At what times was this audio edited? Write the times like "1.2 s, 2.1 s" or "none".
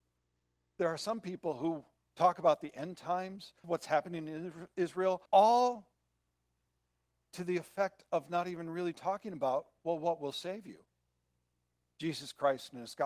3.6 s, 5.3 s